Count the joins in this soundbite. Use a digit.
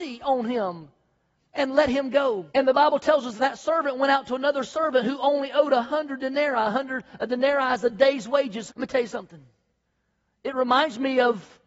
2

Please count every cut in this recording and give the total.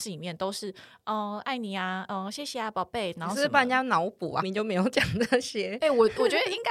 1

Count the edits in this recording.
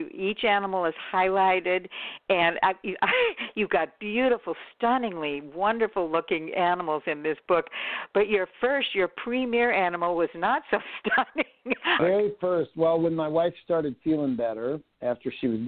1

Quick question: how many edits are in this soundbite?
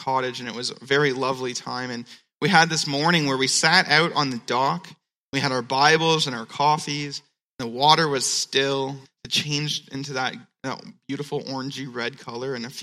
1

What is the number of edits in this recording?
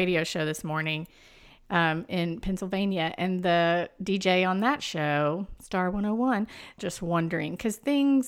1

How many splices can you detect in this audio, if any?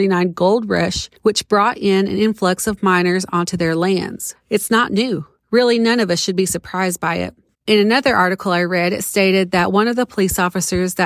2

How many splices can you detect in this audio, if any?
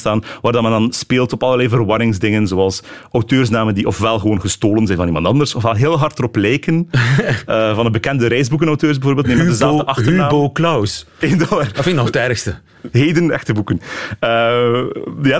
2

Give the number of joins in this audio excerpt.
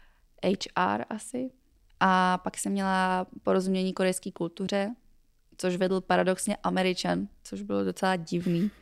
0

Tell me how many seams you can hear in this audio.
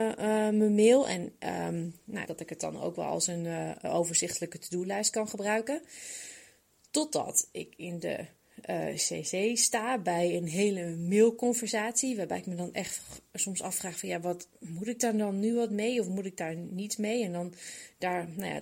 1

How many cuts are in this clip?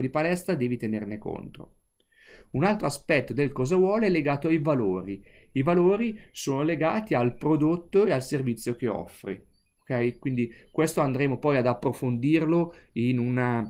0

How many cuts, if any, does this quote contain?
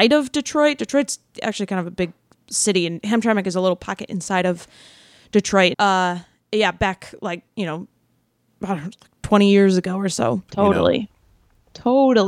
2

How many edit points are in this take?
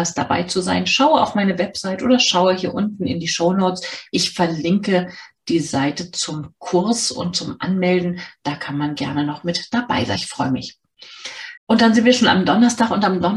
1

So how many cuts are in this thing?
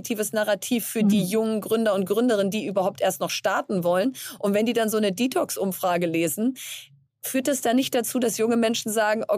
0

